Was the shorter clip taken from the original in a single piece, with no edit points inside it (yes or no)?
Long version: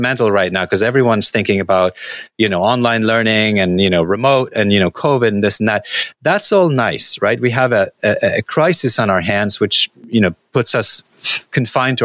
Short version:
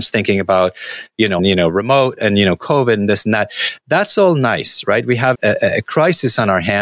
no